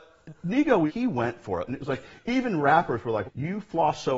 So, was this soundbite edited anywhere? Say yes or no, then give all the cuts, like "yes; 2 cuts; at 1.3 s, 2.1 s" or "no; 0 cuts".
yes; 2 cuts; at 1.7 s, 3.2 s